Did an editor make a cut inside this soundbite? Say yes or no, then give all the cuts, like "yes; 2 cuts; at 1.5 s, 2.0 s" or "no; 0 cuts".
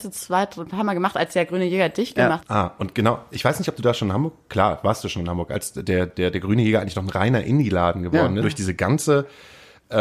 yes; 2 cuts; at 2.4 s, 8.4 s